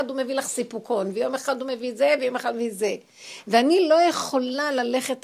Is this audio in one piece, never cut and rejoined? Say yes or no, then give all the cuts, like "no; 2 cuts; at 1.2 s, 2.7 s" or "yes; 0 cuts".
yes; 0 cuts